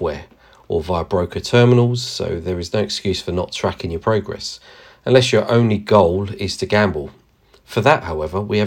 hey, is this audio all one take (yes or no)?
yes